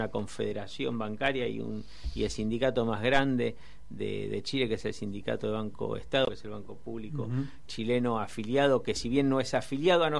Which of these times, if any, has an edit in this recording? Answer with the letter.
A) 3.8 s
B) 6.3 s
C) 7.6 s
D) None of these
B